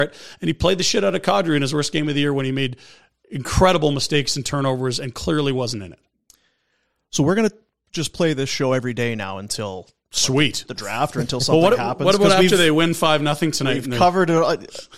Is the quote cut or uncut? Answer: uncut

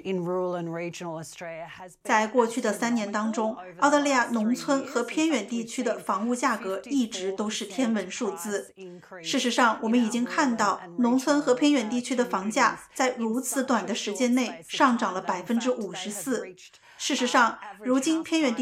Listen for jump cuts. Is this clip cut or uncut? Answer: uncut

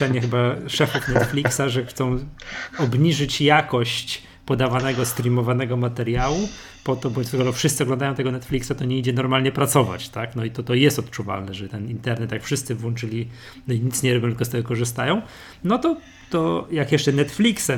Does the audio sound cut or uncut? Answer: uncut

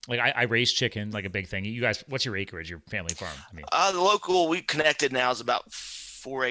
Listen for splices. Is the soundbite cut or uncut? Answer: cut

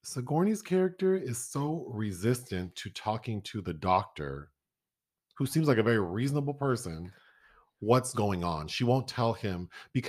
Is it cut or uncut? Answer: uncut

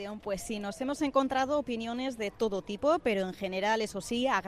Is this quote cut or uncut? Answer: uncut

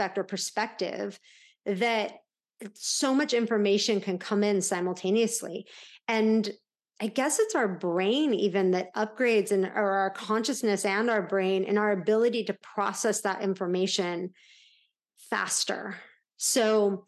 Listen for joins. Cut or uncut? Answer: uncut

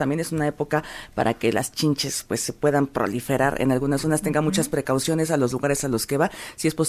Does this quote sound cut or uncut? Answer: uncut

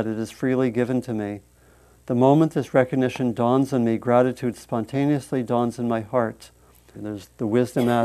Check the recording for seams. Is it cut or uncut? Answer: cut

